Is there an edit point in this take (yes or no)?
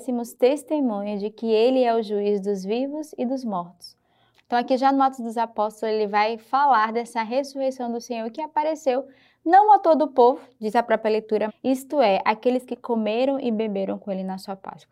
yes